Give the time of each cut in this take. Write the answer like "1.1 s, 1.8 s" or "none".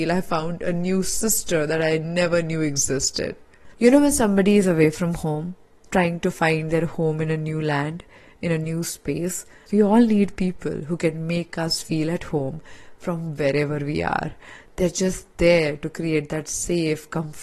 9.7 s